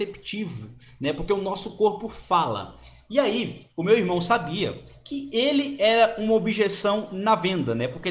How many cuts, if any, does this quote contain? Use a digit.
0